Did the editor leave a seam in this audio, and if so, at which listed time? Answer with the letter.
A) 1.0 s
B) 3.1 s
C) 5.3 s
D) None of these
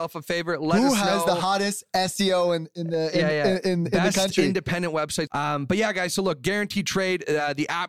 C